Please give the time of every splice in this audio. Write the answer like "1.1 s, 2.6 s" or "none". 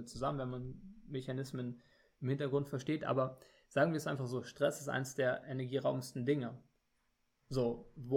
none